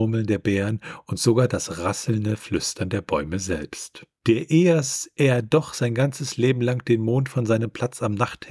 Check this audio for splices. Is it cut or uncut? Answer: cut